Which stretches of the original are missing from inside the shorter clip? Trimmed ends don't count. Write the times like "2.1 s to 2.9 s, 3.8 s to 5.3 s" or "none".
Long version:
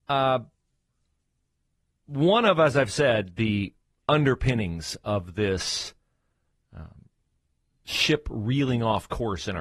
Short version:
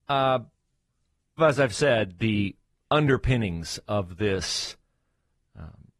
1.4 s to 2.6 s